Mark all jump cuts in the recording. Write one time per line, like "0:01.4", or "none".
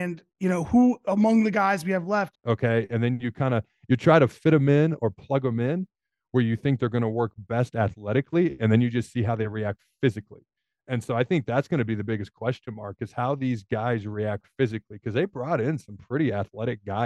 0:02.3